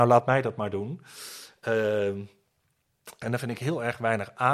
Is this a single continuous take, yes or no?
no